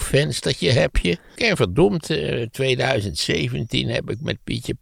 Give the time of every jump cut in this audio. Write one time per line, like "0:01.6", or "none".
0:01.4